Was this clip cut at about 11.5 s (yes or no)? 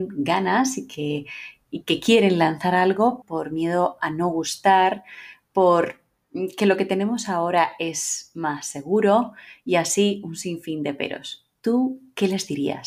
no